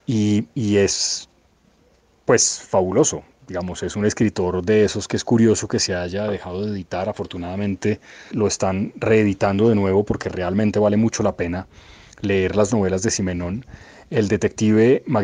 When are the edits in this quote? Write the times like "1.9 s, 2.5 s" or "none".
8.3 s

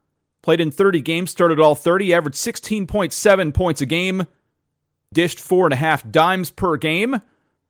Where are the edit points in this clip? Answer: 5.1 s

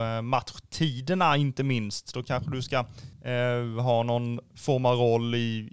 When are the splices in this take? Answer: 3.1 s

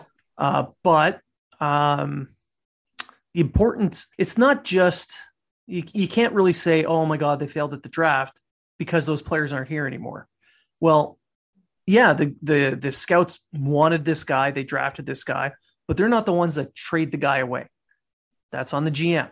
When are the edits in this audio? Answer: 4.1 s

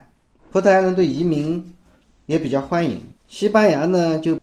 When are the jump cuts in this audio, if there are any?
3.2 s

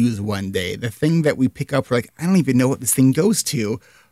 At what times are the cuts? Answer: none

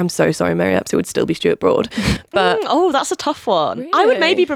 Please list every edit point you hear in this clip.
none

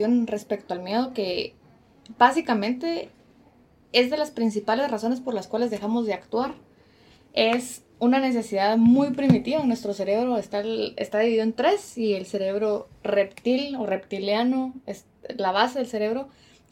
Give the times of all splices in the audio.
none

